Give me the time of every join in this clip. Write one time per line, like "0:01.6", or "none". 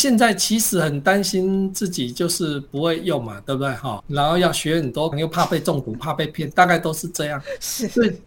0:04.0
0:05.1